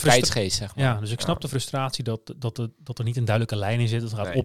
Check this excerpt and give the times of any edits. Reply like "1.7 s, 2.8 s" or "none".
none